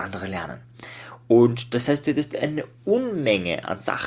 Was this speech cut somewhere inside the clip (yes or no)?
no